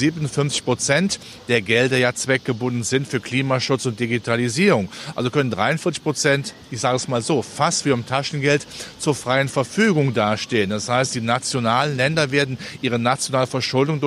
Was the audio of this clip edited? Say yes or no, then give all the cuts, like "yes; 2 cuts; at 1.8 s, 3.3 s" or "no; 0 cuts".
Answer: no; 0 cuts